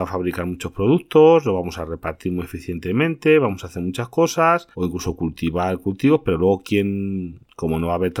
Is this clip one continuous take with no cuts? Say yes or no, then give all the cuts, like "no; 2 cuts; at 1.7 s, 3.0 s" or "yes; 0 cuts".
no; 1 cut; at 4.7 s